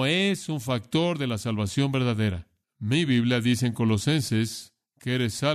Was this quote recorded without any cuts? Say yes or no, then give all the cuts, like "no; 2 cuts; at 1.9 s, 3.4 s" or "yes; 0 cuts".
no; 1 cut; at 2.6 s